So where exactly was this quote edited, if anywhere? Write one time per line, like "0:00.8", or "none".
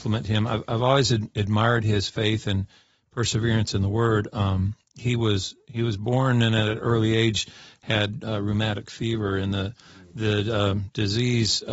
none